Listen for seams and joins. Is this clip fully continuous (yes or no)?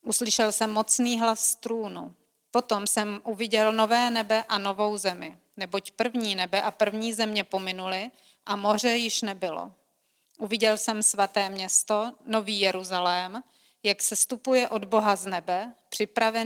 no